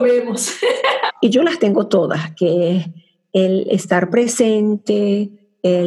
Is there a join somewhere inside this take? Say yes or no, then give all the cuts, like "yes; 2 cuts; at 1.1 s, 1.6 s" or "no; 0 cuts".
yes; 1 cut; at 1.1 s